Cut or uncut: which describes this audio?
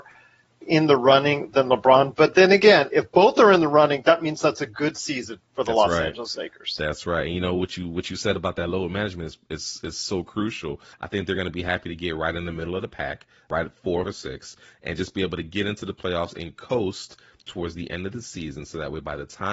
cut